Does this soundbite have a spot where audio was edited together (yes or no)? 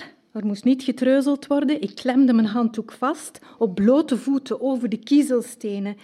no